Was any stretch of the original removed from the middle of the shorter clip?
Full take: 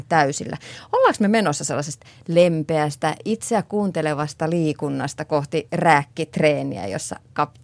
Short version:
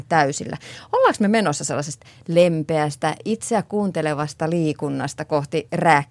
no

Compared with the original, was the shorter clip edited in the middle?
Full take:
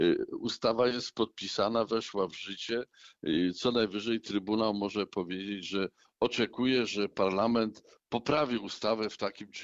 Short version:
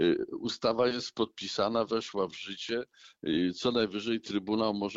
no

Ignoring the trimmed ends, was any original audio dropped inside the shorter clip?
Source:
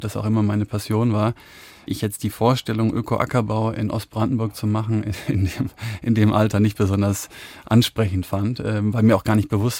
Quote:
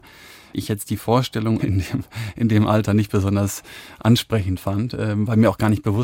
yes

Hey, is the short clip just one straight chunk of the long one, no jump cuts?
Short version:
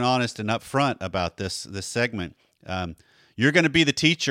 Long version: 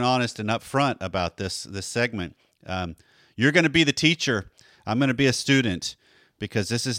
yes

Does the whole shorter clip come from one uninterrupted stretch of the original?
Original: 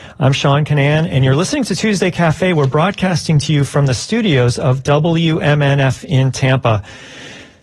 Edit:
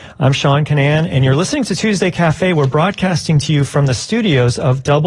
yes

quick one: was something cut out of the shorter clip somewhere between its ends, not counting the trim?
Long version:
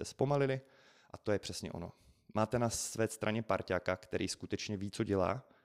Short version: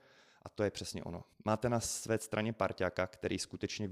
yes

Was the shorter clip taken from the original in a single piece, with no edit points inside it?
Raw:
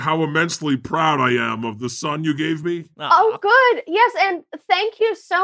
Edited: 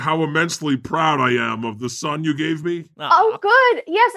yes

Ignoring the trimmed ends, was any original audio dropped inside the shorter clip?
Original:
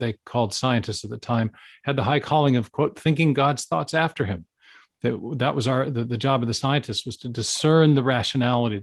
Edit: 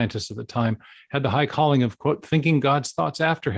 no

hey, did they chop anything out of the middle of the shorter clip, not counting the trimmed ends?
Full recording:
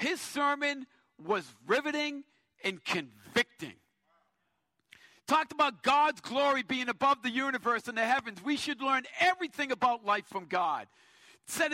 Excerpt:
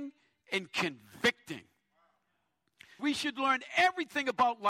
yes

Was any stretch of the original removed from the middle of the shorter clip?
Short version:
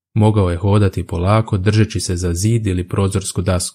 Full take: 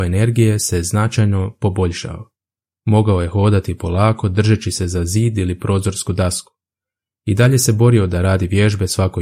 no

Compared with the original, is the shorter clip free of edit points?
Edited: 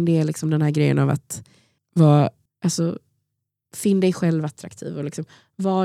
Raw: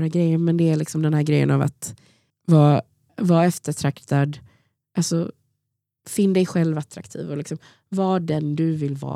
no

